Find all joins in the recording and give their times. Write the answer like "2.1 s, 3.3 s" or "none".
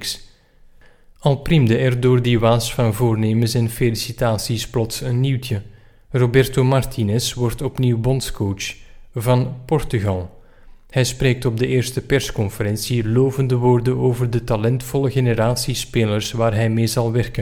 none